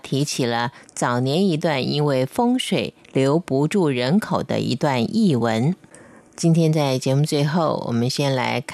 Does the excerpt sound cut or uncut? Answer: cut